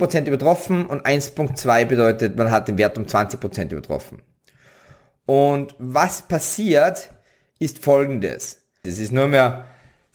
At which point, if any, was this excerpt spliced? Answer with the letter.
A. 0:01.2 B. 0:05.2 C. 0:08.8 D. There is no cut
C